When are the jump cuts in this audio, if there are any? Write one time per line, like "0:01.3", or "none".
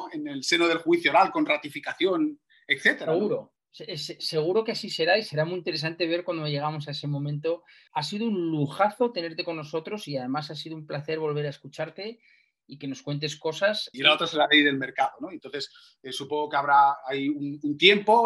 0:07.9
0:13.9

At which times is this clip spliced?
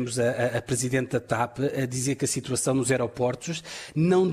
none

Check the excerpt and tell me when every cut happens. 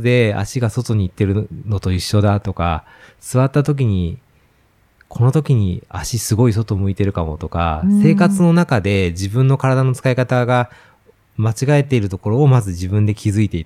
none

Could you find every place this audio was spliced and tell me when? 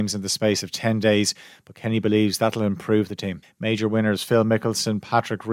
0:03.4

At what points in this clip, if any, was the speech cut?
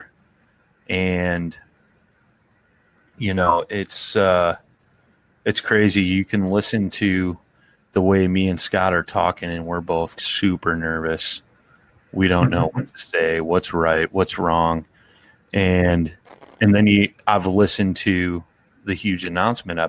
0:10.1

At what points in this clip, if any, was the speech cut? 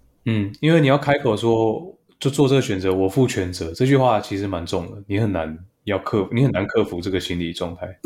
none

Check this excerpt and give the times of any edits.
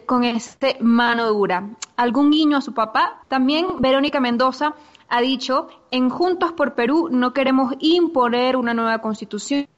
0:03.2

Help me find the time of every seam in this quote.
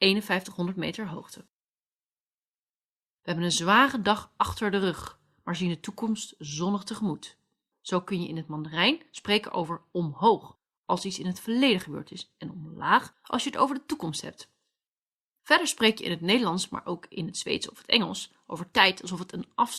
0:03.2
0:07.7

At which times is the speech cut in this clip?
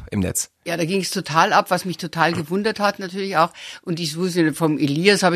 none

